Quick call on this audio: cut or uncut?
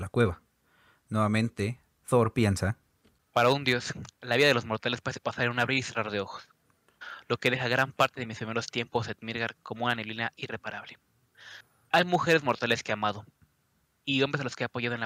uncut